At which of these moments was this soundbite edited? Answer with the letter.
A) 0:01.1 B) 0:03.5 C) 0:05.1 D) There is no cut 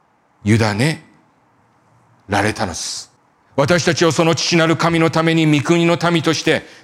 B